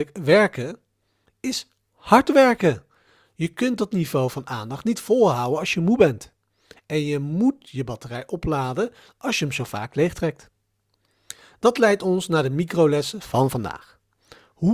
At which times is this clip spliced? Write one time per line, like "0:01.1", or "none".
none